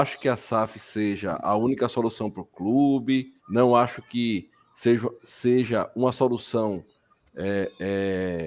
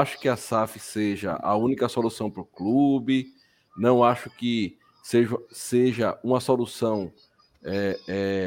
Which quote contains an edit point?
first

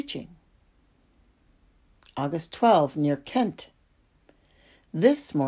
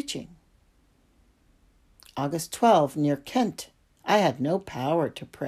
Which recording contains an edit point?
second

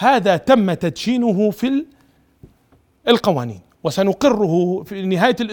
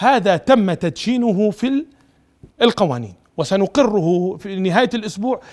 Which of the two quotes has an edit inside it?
second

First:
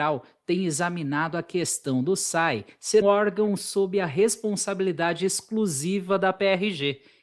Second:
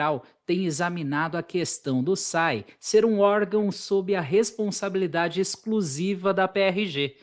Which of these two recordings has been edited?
first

